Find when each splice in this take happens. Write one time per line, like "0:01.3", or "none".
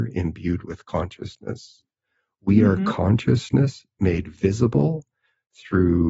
none